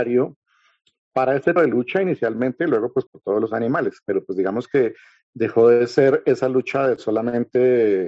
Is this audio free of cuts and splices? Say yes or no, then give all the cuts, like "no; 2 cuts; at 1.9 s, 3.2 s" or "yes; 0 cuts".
no; 2 cuts; at 1.6 s, 3.1 s